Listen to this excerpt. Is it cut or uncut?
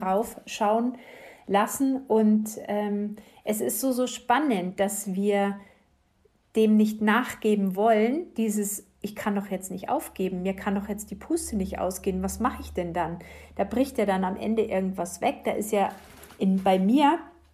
uncut